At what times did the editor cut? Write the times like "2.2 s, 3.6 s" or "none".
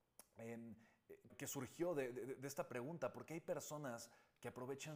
1.3 s